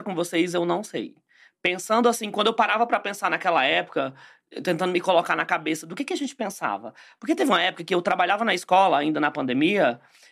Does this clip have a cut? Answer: no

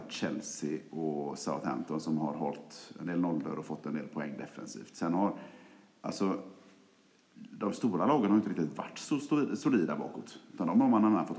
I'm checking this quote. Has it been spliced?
no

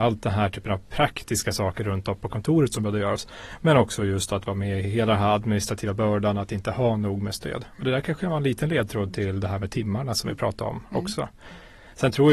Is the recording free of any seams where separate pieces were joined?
yes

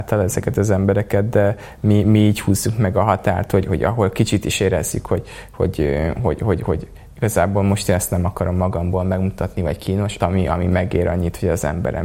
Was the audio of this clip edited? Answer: yes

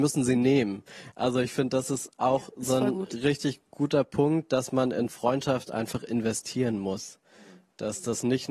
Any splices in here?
no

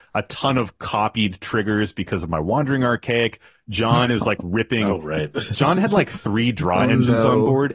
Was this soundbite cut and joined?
no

